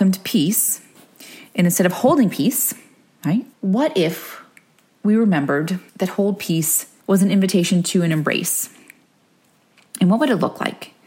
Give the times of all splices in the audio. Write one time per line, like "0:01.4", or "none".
0:03.5
0:05.9
0:07.0